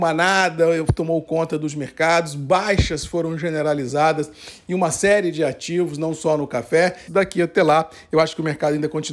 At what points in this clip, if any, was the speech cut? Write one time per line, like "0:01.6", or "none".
0:07.1